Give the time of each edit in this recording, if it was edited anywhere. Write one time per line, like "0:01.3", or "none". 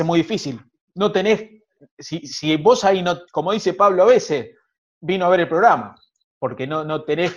0:03.3